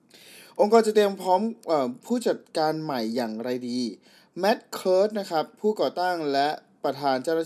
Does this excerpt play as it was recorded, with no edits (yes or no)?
yes